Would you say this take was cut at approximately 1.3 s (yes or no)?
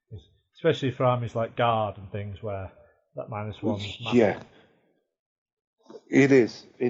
no